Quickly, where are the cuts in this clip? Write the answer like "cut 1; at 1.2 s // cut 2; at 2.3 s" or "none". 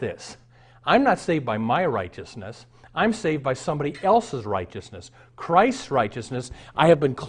none